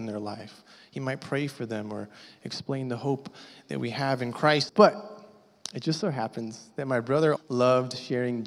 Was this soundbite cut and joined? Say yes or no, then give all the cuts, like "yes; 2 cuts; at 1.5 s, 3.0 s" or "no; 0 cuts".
yes; 2 cuts; at 4.7 s, 7.4 s